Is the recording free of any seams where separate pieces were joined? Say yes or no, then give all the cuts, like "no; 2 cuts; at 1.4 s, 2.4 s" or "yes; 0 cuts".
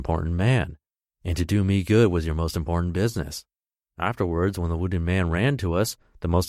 yes; 0 cuts